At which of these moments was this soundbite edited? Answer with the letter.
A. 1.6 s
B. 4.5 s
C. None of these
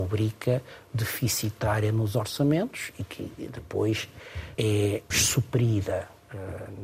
B